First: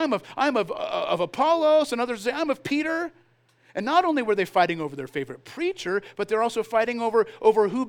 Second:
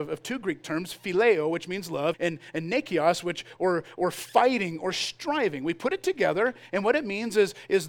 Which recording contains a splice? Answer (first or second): second